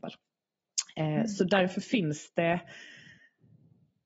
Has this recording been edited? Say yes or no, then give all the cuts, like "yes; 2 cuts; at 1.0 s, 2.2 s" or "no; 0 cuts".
no; 0 cuts